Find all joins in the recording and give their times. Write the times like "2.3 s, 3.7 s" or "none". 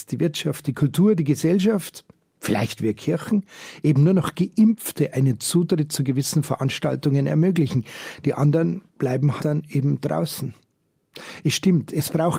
9.4 s